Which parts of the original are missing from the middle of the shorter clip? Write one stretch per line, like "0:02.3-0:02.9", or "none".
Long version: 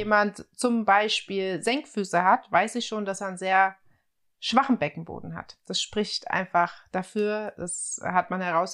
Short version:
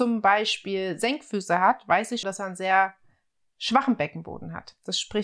0:02.9-0:03.0

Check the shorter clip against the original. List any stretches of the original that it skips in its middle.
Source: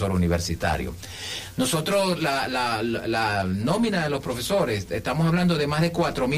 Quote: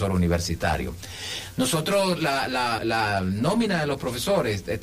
0:02.8-0:03.0

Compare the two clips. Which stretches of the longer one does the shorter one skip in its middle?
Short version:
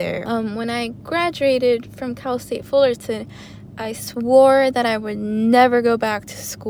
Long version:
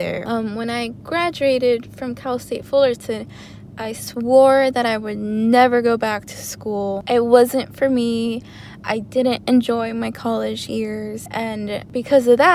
none

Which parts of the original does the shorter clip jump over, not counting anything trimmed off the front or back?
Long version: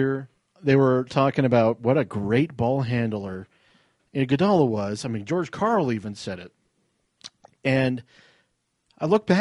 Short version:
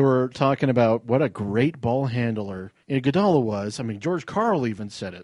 0:03.6-0:04.1

